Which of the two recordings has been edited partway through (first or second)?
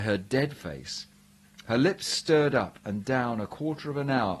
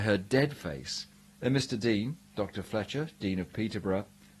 second